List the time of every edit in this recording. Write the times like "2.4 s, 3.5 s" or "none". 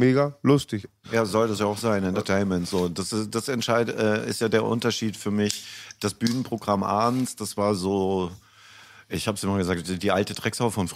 1.0 s